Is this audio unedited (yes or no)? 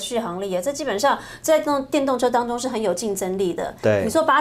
yes